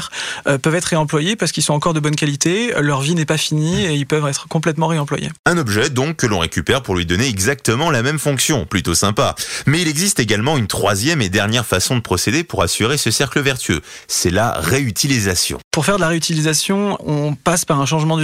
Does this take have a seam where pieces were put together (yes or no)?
no